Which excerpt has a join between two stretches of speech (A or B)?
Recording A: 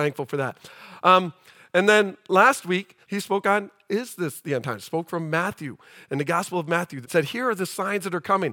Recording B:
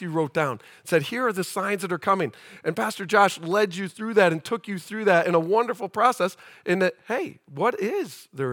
A